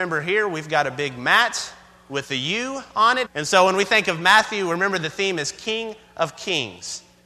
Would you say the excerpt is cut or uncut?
cut